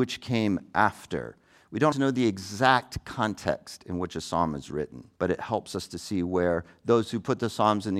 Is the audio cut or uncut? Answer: cut